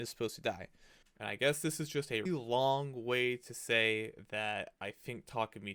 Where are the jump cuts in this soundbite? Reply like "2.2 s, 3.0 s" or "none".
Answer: 1.0 s, 2.3 s